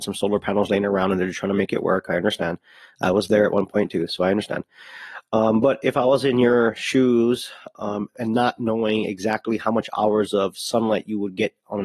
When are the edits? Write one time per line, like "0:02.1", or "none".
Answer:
none